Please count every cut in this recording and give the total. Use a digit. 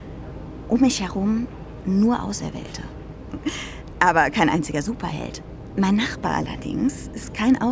2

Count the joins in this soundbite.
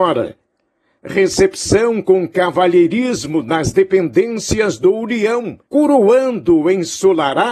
2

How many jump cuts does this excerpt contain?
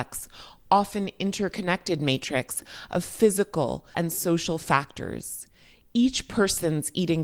1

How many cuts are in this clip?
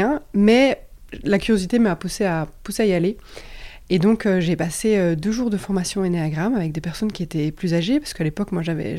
0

